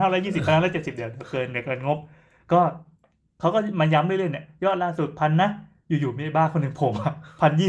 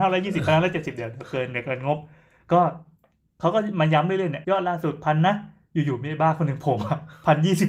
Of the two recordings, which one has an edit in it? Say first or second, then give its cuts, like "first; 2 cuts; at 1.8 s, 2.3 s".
second; 1 cut; at 4.4 s